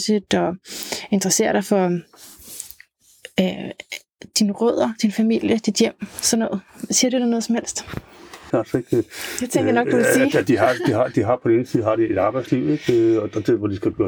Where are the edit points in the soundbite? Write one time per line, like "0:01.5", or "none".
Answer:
0:08.5